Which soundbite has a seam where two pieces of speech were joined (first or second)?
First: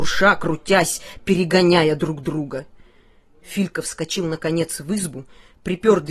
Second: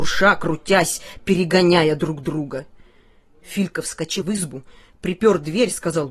second